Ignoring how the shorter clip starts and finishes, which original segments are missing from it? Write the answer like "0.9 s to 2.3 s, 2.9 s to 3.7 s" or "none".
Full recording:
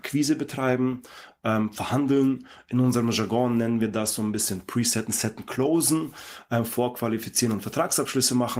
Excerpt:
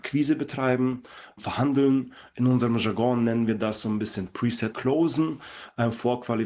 1.4 s to 1.7 s, 5.1 s to 5.5 s